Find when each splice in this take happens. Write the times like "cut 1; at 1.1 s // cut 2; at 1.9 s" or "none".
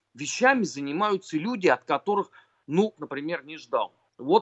cut 1; at 3.0 s

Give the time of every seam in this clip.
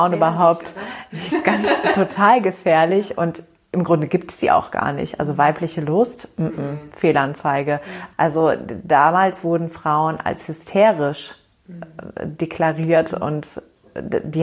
cut 1; at 8.1 s // cut 2; at 13.1 s

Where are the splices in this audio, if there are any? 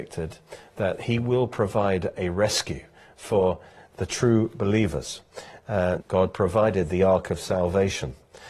cut 1; at 6.0 s

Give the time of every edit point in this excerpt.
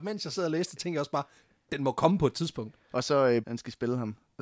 cut 1; at 3.4 s

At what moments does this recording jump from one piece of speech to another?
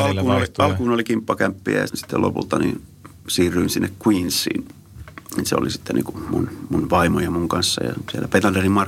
cut 1; at 1.9 s

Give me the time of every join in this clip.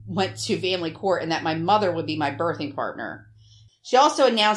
cut 1; at 3.7 s

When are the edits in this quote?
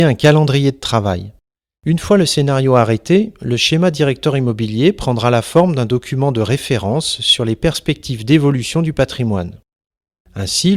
cut 1; at 1.8 s

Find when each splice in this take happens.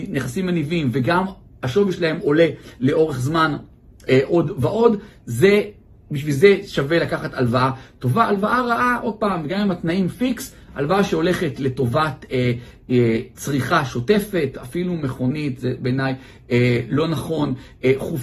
none

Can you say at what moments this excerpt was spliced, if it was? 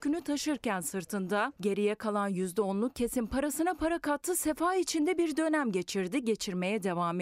none

